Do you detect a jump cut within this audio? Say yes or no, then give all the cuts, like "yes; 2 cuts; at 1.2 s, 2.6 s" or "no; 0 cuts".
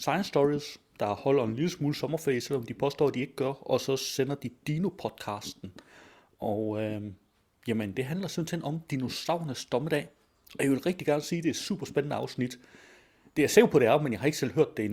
no; 0 cuts